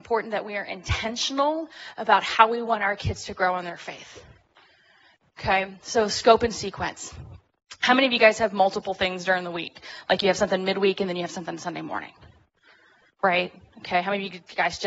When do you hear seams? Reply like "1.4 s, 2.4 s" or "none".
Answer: none